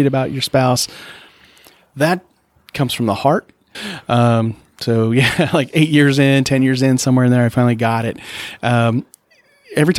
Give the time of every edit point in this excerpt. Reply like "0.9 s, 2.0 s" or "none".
3.7 s